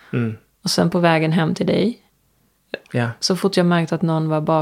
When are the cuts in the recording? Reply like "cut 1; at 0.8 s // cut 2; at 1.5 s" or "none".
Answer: cut 1; at 2.8 s